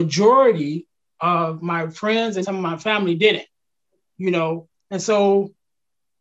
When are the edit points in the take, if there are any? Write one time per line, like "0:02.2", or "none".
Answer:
0:02.4
0:04.7